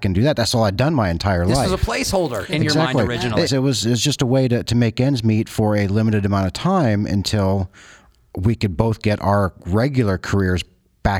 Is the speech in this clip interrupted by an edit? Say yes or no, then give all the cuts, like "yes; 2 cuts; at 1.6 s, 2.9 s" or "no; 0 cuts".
yes; 1 cut; at 3.5 s